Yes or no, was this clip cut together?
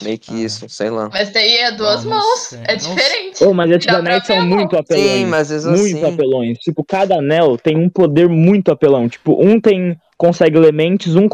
no